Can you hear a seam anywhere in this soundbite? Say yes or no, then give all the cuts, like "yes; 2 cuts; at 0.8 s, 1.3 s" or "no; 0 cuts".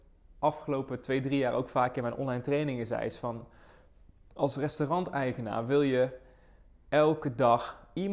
no; 0 cuts